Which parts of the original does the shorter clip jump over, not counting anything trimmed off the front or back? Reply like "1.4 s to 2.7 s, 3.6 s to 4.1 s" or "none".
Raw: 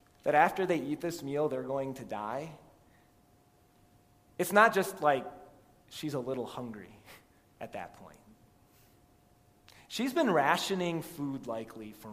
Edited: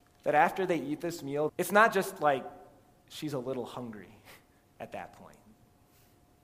1.5 s to 4.3 s